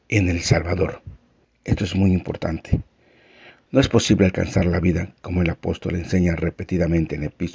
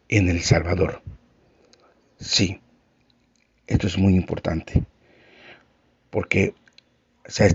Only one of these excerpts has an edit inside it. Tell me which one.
first; 2 cuts; at 1.4 s, 3.7 s

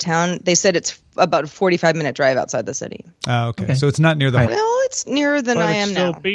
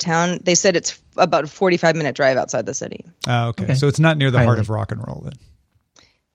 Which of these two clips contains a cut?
first; 1 cut; at 4.5 s

